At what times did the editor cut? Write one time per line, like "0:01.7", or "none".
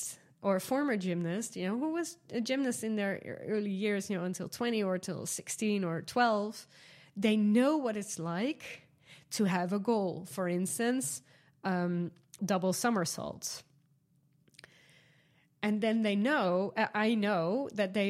0:12.4